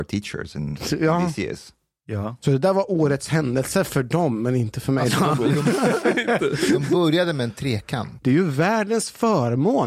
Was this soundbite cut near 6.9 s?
no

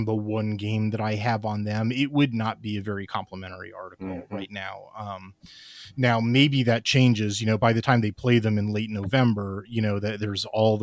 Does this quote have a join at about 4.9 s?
no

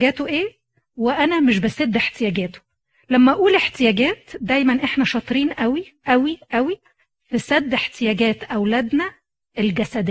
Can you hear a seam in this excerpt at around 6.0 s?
no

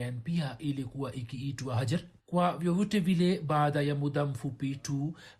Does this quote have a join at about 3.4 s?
no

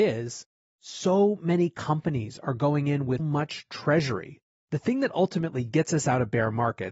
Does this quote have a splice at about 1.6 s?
no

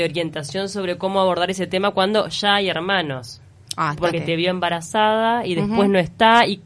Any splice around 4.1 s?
yes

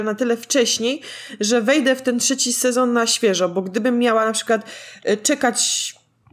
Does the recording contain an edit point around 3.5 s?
no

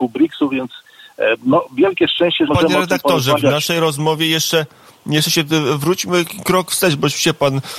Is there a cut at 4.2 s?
no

